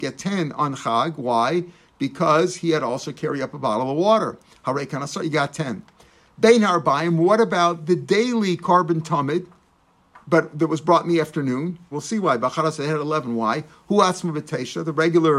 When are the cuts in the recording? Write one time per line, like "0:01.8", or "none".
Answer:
0:05.2
0:11.9